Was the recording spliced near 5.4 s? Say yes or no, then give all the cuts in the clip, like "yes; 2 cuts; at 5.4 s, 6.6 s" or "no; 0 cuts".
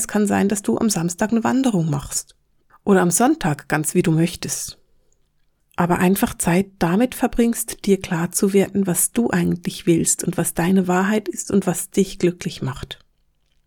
no; 0 cuts